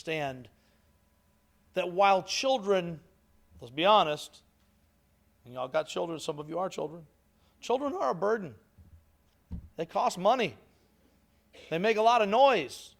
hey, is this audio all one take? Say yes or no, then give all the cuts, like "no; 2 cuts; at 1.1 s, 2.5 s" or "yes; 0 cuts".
yes; 0 cuts